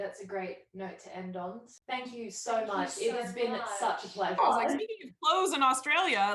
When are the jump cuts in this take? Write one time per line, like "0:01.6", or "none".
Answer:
0:04.4